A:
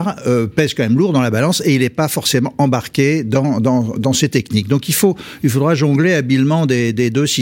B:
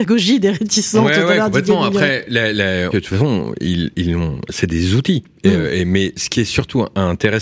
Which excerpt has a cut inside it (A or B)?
B